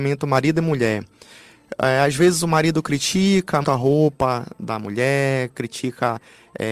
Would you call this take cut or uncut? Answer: cut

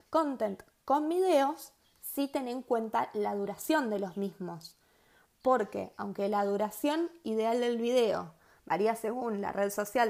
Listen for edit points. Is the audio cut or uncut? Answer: uncut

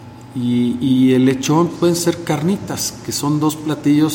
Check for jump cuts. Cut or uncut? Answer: cut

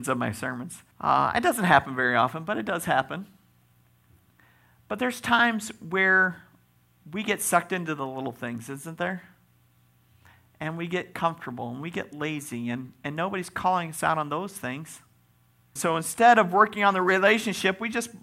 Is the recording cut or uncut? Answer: cut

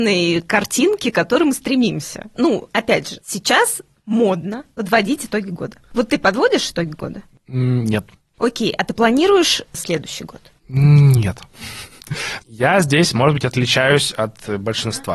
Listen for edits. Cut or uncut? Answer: uncut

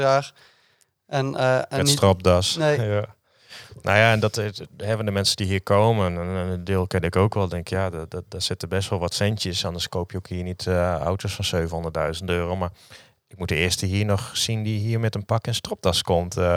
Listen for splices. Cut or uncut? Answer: uncut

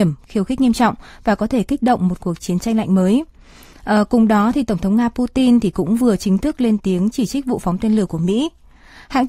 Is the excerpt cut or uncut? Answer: uncut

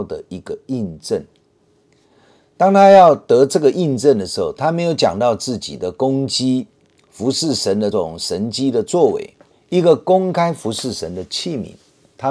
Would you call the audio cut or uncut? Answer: cut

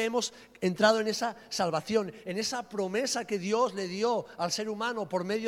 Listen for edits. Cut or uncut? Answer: uncut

